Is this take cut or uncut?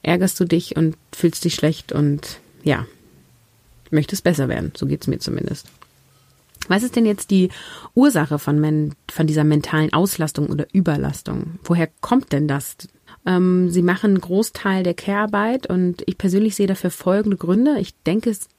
cut